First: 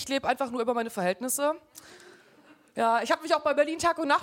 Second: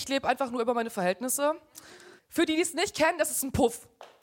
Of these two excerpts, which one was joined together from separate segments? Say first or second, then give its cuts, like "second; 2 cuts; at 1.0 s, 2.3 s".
second; 1 cut; at 2.2 s